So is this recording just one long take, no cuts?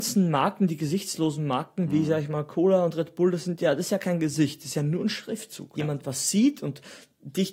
no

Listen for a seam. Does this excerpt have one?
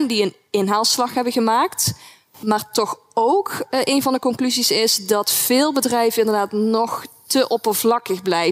no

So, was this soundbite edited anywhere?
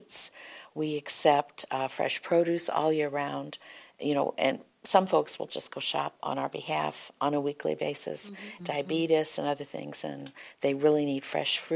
yes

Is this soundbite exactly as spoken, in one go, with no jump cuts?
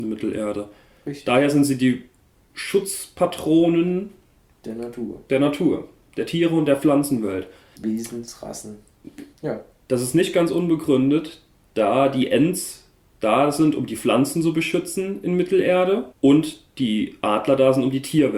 no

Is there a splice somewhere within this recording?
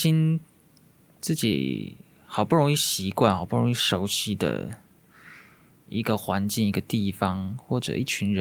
no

